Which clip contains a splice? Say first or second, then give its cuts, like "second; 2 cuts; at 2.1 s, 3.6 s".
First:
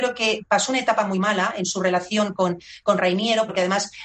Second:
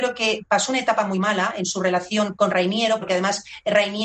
second; 1 cut; at 2.4 s